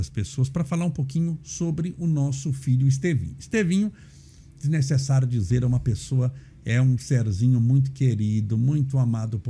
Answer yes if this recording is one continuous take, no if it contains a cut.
yes